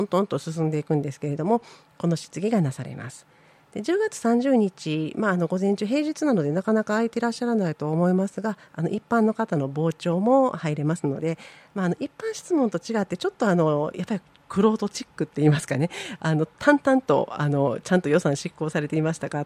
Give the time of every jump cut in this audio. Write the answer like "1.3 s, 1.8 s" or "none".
none